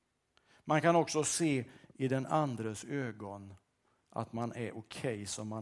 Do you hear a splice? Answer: no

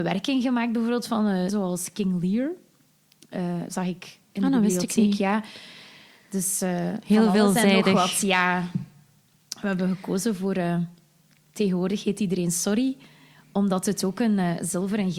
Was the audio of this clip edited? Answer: yes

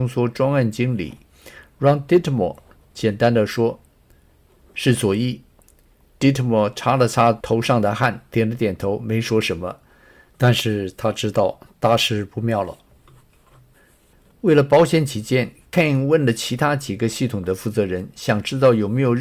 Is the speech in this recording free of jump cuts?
yes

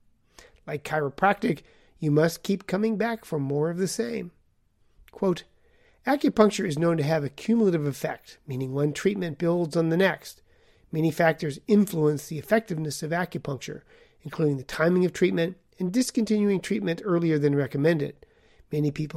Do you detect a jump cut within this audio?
no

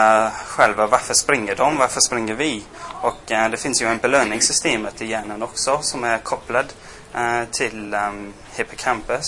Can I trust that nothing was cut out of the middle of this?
yes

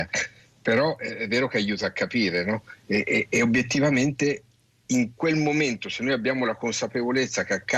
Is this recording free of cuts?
yes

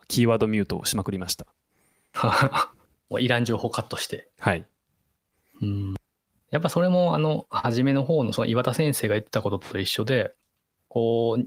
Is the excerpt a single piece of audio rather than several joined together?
yes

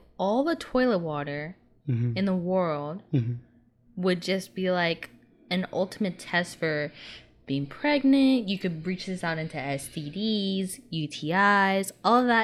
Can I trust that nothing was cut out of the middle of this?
yes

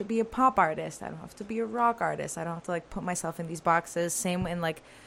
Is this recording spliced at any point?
no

